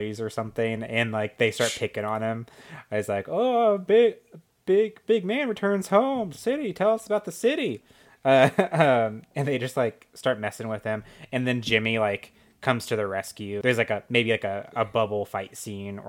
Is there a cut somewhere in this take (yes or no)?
no